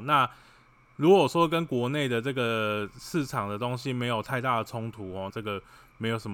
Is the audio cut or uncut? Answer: cut